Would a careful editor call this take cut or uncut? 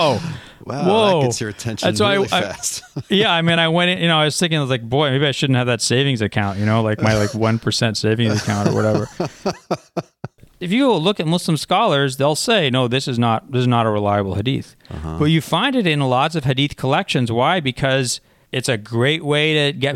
uncut